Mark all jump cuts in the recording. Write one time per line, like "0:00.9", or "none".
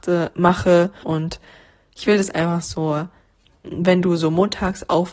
0:01.0
0:03.6